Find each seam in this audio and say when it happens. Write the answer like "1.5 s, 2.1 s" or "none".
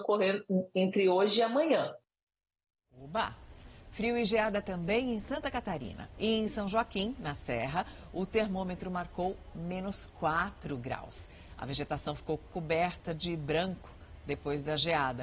6.1 s